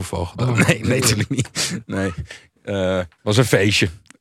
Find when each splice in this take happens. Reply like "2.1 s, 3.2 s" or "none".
3.2 s